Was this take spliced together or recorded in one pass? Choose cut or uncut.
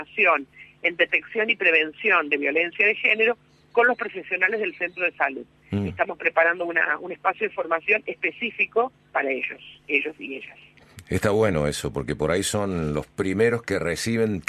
uncut